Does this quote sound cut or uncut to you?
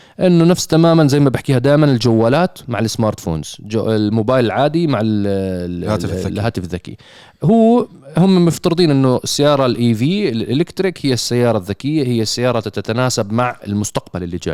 uncut